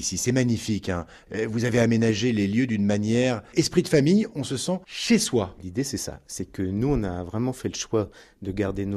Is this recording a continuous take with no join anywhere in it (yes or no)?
yes